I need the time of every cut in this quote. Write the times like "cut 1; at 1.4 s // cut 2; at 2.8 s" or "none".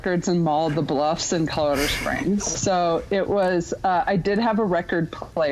cut 1; at 2.5 s